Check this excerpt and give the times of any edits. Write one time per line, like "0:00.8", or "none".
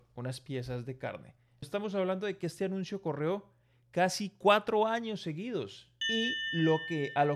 0:01.6
0:06.0